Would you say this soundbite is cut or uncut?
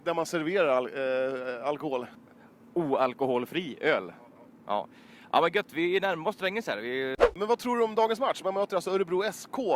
uncut